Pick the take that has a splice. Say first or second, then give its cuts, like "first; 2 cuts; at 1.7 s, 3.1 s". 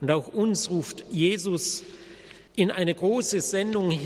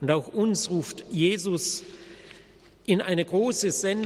first; 1 cut; at 2.5 s